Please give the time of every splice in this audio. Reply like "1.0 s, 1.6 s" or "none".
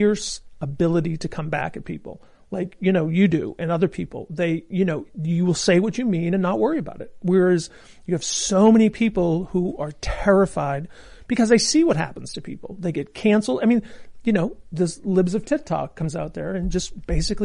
none